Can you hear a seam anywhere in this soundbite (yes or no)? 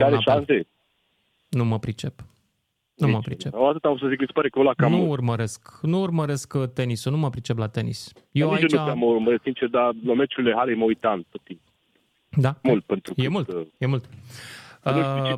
yes